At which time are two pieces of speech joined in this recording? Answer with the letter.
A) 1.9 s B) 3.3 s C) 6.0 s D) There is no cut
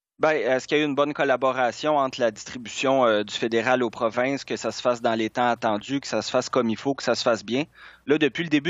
D